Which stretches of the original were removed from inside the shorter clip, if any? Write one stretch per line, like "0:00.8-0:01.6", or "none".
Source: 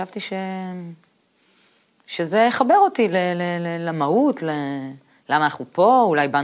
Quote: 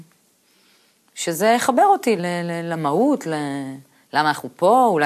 0:03.1-0:03.3